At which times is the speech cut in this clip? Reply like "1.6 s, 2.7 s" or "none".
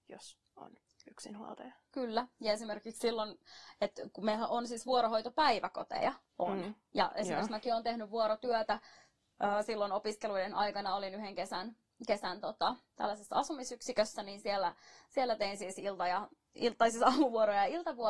none